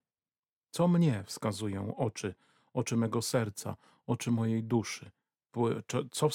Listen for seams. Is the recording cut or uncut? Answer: uncut